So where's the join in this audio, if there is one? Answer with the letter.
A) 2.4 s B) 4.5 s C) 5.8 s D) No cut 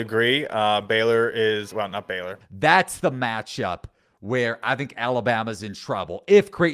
A